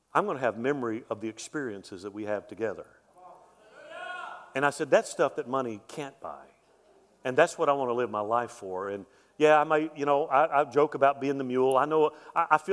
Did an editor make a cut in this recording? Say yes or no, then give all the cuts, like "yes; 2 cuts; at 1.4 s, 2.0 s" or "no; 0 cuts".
no; 0 cuts